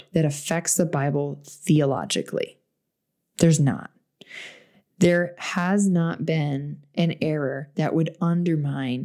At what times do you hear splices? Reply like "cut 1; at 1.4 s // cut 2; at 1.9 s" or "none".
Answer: none